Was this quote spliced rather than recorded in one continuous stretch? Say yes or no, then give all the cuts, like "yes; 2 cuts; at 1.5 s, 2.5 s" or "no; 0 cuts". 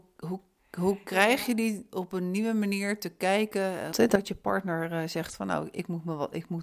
yes; 1 cut; at 3.9 s